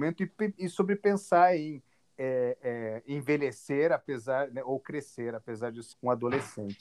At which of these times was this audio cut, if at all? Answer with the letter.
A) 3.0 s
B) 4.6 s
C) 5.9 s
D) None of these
C